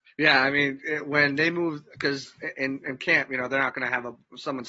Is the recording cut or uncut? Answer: uncut